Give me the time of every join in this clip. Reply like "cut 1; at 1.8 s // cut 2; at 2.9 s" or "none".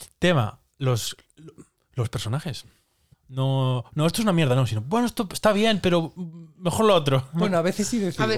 cut 1; at 3.1 s